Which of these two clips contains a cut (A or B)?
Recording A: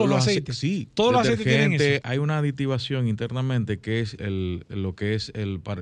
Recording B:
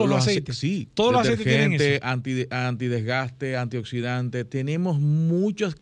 A